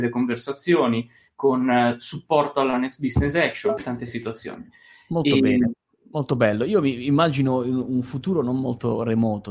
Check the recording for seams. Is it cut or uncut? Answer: cut